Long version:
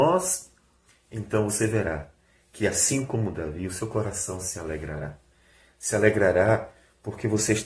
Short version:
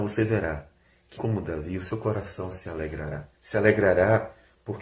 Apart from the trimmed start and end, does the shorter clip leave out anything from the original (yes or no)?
yes